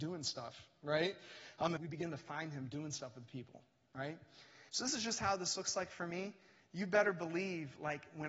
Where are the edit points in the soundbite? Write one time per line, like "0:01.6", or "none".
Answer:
0:01.8
0:04.7